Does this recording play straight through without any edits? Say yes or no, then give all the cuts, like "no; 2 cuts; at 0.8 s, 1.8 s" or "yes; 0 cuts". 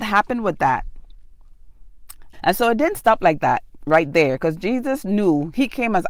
no; 1 cut; at 2.3 s